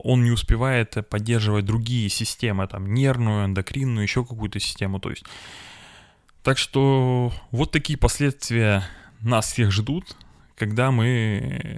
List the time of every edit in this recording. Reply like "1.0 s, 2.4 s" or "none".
none